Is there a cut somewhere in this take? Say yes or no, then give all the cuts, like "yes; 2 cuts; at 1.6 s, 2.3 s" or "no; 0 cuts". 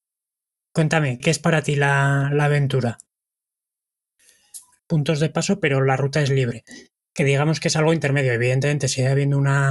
yes; 2 cuts; at 1.2 s, 4.8 s